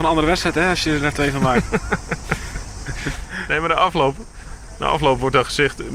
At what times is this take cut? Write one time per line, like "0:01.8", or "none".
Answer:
none